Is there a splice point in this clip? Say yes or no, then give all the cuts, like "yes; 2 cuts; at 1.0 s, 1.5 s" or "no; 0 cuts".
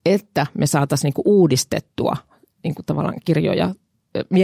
no; 0 cuts